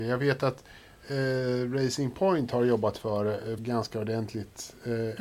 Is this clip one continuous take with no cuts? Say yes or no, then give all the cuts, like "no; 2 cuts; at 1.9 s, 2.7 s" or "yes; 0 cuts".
no; 1 cut; at 3.6 s